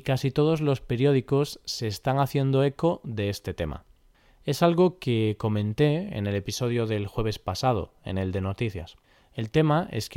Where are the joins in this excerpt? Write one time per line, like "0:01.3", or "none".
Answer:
none